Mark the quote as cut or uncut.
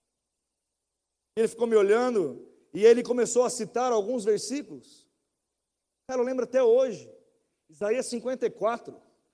uncut